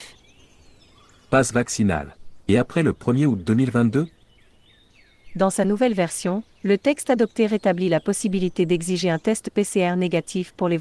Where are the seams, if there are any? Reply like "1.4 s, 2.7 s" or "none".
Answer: none